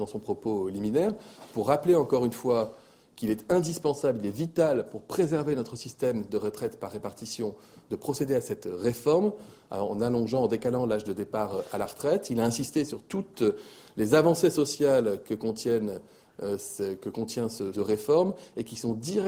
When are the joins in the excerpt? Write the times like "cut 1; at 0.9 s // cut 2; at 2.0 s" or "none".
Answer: cut 1; at 17.7 s